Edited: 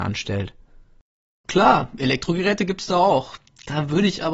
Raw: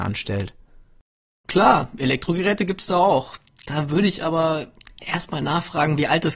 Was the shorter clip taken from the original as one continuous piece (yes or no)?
yes